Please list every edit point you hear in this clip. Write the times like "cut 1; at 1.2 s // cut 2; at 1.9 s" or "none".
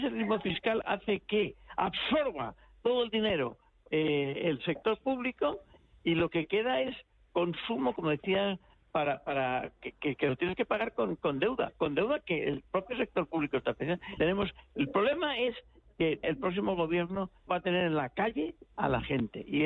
cut 1; at 14.2 s // cut 2; at 16.2 s // cut 3; at 17.5 s